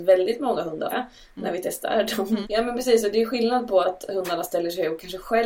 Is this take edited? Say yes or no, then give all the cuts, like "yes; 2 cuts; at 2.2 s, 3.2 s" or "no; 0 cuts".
yes; 3 cuts; at 0.9 s, 2.4 s, 3.8 s